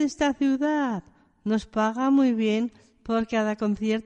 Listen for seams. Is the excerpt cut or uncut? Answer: uncut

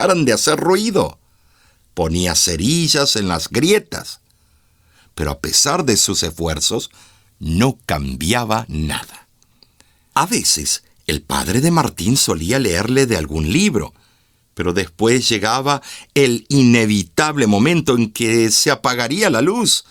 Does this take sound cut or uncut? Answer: uncut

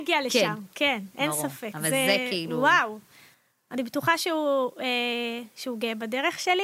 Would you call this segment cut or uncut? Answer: uncut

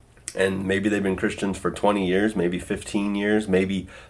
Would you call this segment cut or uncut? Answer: uncut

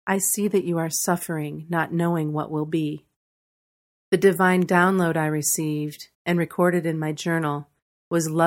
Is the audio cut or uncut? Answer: cut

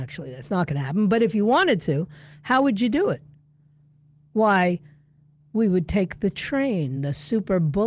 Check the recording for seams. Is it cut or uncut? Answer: uncut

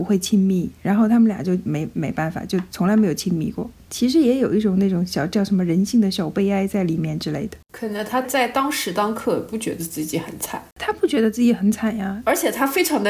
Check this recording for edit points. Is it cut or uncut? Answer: cut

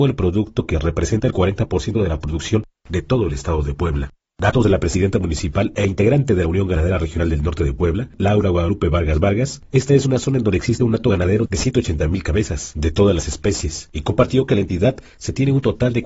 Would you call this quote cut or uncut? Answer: uncut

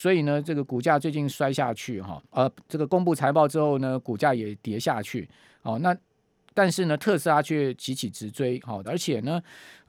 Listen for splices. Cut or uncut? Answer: cut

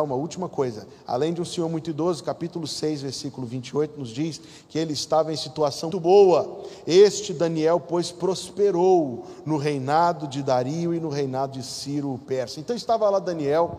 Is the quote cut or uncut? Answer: cut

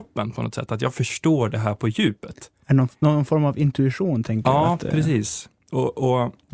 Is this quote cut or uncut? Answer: uncut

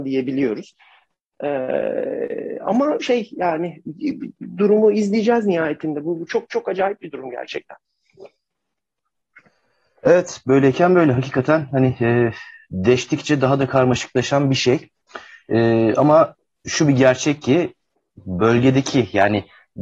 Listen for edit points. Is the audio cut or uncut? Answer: uncut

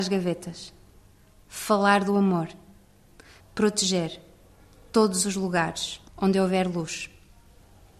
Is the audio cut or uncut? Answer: cut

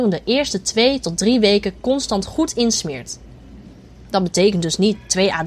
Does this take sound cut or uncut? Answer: uncut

